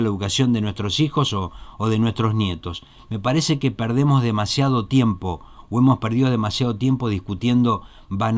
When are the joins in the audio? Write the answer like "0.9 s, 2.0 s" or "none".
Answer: none